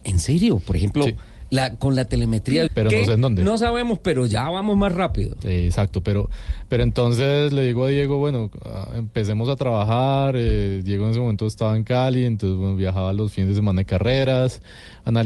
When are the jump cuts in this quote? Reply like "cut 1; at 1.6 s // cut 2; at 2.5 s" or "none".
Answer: cut 1; at 2.7 s